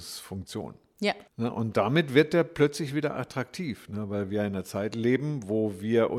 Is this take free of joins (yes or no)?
no